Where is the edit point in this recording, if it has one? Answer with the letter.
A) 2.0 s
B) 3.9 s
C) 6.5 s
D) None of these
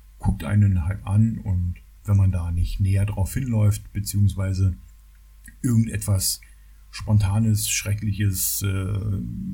A